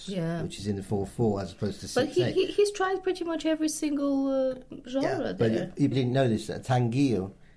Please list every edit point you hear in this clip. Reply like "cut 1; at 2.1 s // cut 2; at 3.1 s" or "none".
cut 1; at 5.9 s